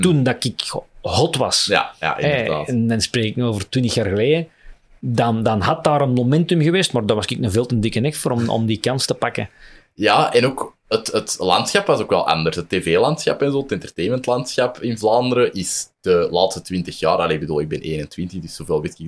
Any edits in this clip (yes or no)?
no